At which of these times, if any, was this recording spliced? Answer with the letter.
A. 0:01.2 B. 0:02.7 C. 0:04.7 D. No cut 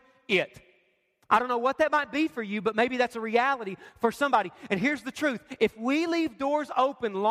D